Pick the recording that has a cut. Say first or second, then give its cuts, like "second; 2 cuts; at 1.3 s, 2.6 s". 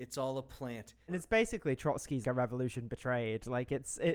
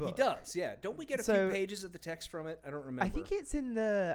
first; 2 cuts; at 1.1 s, 2.2 s